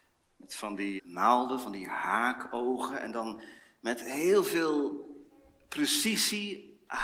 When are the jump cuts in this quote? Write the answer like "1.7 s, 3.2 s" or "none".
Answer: 1.0 s